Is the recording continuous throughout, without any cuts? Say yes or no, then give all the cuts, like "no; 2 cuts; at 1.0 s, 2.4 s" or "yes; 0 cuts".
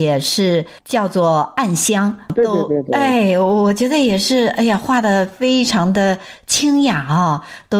yes; 0 cuts